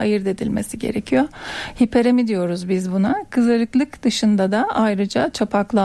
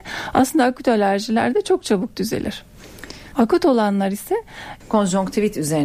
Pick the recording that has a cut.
second; 2 cuts; at 3.3 s, 4.8 s

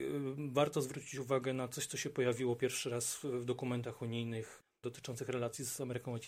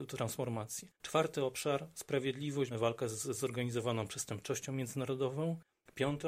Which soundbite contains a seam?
second; 2 cuts; at 1.0 s, 2.7 s

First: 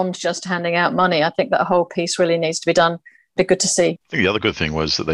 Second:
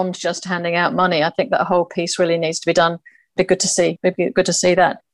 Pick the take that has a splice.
first; 1 cut; at 4.0 s

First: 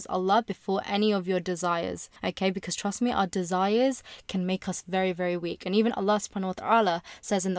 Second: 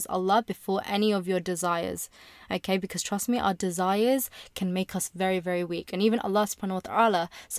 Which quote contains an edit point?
first; 1 cut; at 2.2 s

